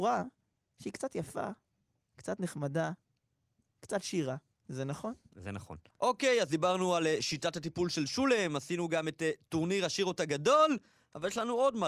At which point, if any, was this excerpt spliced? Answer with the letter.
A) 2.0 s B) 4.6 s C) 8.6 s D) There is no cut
B